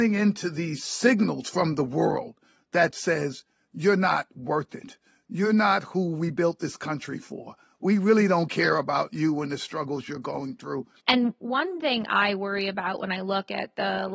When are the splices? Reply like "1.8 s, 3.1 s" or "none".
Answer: 11.0 s